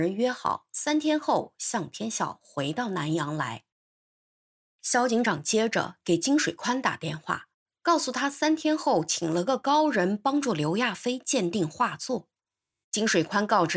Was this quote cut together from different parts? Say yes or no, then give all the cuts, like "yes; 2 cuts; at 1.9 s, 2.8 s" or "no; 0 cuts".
no; 0 cuts